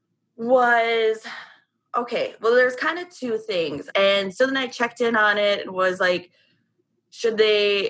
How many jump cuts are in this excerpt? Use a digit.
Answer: 1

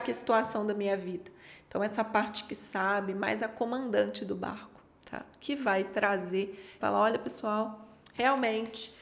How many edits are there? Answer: 1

